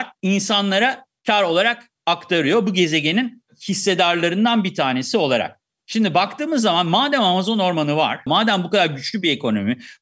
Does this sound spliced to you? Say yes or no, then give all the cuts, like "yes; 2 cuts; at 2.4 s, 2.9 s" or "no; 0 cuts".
yes; 1 cut; at 8.3 s